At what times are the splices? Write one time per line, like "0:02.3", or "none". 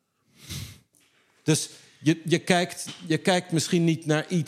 none

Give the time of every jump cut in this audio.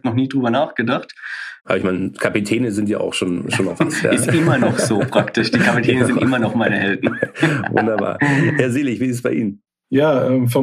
0:01.6

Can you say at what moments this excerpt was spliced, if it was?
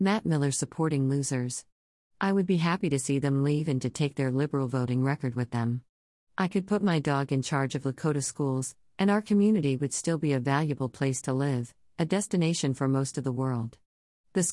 none

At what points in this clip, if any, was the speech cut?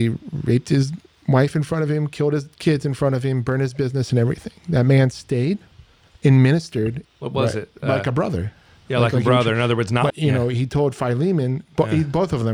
0:07.0
0:10.1

